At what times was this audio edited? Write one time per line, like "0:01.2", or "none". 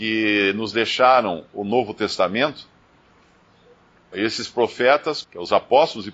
0:04.1
0:05.2